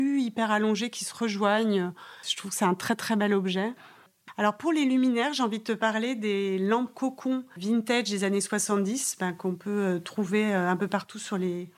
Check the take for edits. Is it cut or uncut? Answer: uncut